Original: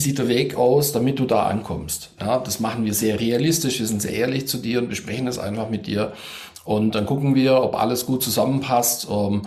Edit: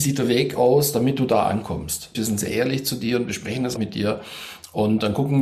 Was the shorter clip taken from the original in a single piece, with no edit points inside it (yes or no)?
no